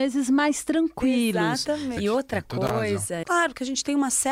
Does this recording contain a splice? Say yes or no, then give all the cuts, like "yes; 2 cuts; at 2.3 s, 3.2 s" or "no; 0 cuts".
yes; 2 cuts; at 2.0 s, 3.2 s